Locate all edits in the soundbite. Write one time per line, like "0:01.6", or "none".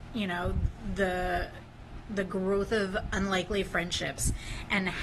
none